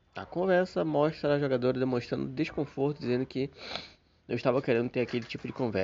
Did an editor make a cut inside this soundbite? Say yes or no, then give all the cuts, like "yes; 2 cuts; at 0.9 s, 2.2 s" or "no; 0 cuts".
no; 0 cuts